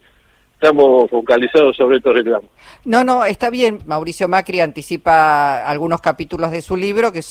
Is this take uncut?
no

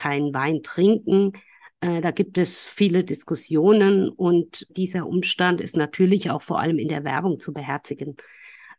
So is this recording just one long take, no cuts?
no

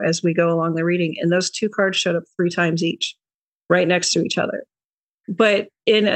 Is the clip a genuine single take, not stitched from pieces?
no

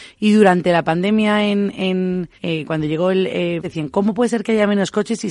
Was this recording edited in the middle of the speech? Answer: yes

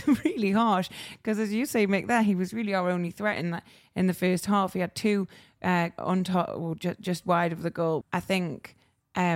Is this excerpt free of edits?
no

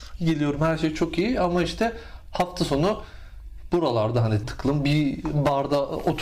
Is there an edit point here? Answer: yes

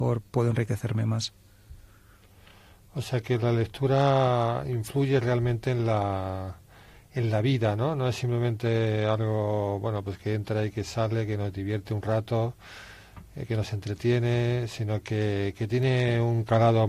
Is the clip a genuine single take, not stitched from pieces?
yes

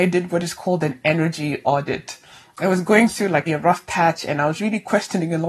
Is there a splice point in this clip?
yes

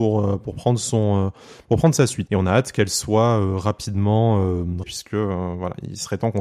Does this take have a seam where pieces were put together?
yes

